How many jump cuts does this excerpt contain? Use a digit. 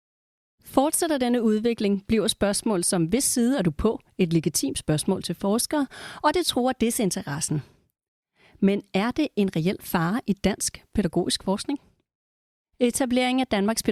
0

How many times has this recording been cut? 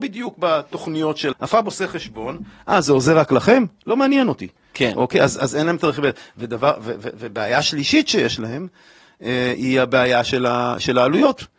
1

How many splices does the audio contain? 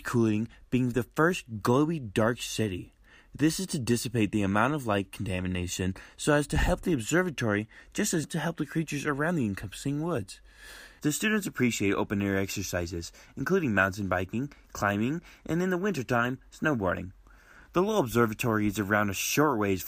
2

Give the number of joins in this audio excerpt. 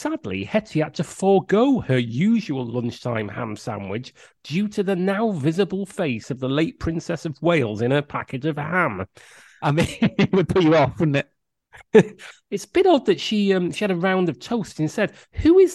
1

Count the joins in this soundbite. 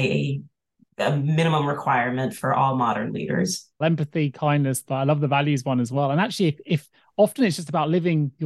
2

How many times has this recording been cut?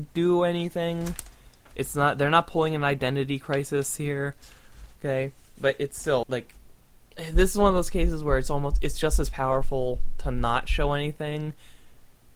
1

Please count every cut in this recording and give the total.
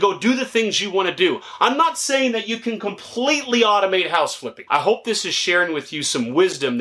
1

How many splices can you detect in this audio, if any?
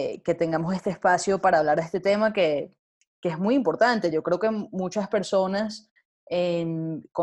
0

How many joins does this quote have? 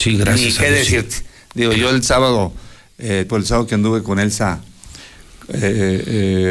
1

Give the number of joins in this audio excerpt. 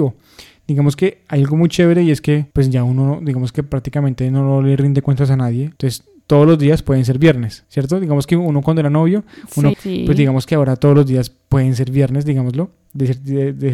1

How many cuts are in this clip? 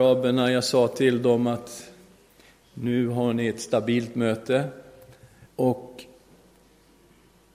1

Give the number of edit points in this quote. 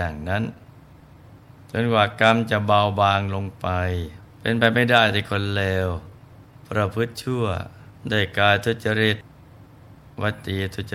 2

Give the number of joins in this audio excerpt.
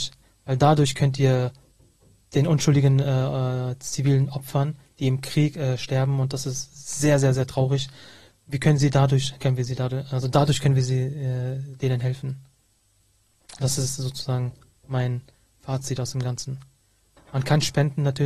1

